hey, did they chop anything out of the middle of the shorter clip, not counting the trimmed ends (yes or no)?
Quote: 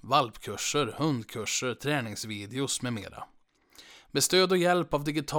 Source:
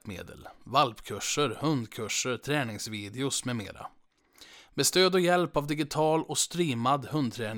no